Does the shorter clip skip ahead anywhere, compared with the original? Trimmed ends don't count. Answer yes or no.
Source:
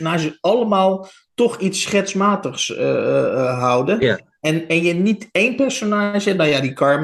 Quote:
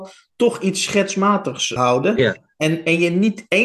yes